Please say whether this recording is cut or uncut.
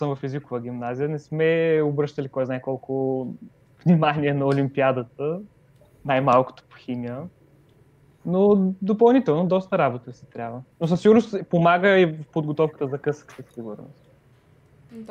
cut